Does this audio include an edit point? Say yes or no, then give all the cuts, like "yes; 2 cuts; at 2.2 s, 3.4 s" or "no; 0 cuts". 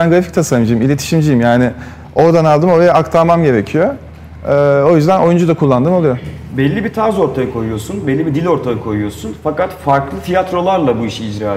no; 0 cuts